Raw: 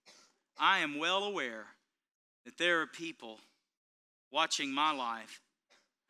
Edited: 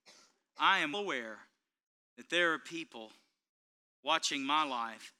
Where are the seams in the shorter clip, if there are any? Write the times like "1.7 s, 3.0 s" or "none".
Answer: 0.9 s

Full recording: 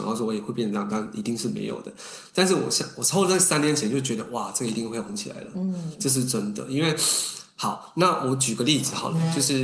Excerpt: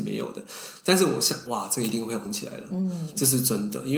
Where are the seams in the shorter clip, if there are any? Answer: 1.5 s

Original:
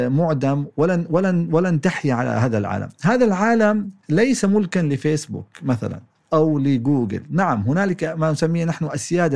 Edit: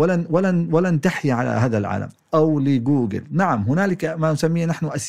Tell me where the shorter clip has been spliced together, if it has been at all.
2.2 s

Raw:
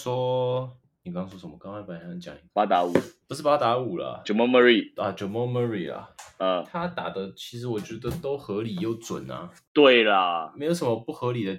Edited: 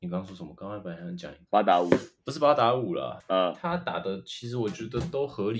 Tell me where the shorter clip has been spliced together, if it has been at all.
3.2 s

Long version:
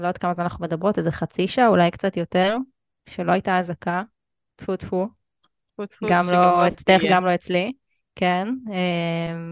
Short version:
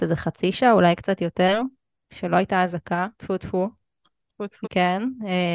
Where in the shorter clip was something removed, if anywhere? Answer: 3.1 s, 4.6 s

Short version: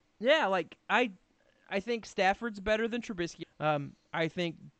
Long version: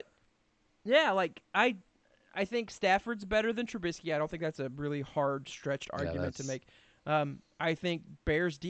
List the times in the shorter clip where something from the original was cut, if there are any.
3.4 s

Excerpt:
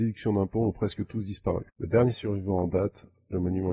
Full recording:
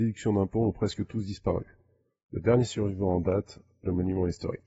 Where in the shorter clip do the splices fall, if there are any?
1.7 s

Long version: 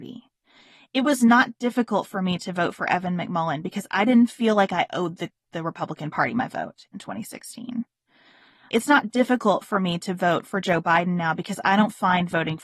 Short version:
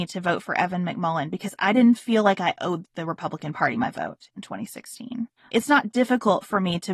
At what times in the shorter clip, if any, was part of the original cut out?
2.8 s, 5.4 s

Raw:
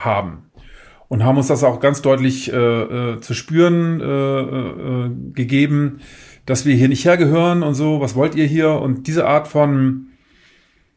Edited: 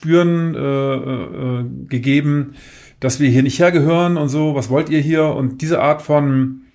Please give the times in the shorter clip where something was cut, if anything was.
none

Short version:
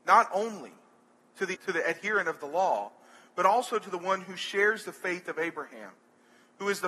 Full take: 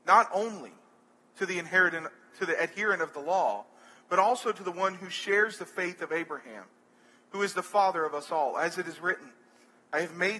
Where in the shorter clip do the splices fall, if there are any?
1.5 s

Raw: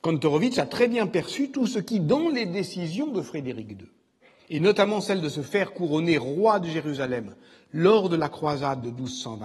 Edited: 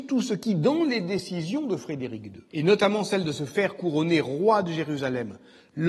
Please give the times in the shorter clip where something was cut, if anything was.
2.5 s

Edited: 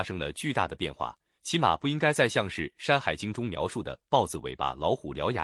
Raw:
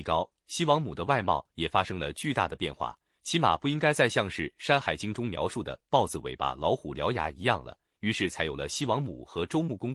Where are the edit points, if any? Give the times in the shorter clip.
none

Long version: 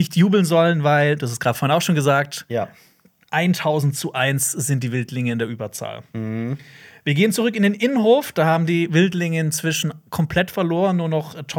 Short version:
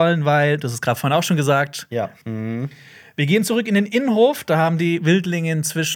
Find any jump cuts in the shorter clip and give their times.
2.2 s

